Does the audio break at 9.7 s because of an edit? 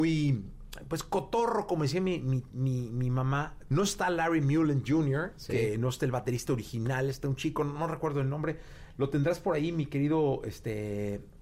no; 1 cut; at 3.7 s

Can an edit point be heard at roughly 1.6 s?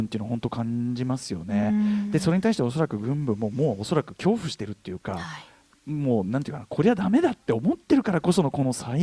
no; 0 cuts

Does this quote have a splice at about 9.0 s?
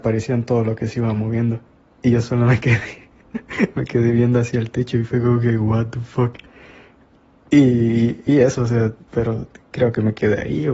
yes; 1 cut; at 9.0 s

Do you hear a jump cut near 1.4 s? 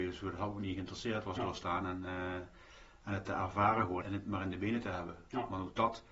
yes; 2 cuts; at 1.4 s, 4.0 s

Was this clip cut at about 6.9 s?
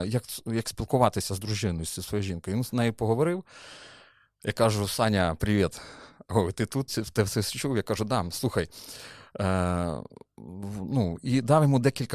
yes; 1 cut; at 6.9 s

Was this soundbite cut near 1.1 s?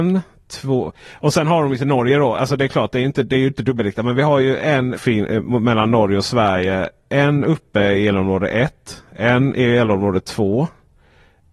no; 1 cut; at 5.0 s

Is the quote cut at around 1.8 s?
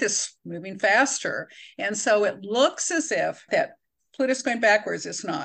no; 1 cut; at 3.5 s

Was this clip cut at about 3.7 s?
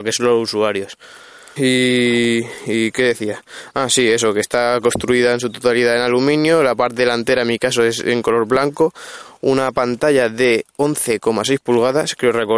no; 1 cut; at 1.6 s

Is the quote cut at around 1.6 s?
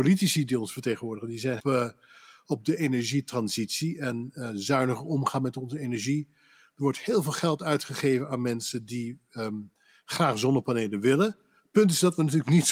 yes; 1 cut; at 1.6 s

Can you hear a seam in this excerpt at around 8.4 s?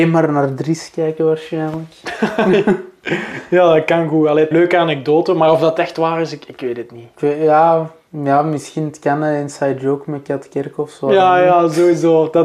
no; 1 cut; at 4.5 s

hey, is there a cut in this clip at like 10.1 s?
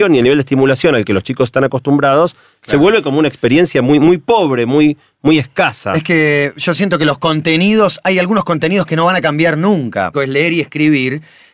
yes; 1 cut; at 10.1 s

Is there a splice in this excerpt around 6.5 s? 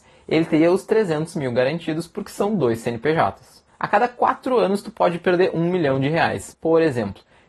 yes; 2 cuts; at 3.7 s, 6.5 s

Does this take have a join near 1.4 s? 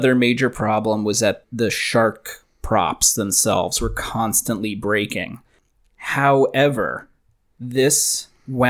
yes; 1 cut; at 1.4 s

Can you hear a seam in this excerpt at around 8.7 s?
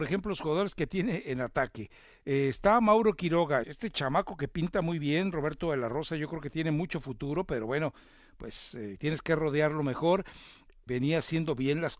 no; 2 cuts; at 3.6 s, 10.9 s

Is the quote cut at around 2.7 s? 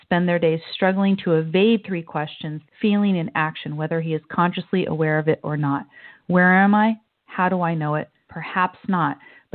yes; 2 cuts; at 2.7 s, 8.3 s

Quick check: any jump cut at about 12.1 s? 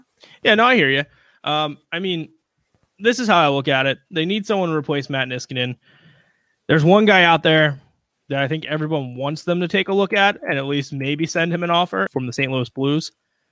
yes; 1 cut; at 12.1 s

